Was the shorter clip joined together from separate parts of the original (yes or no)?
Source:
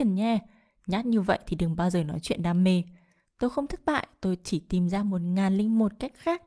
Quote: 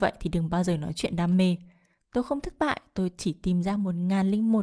no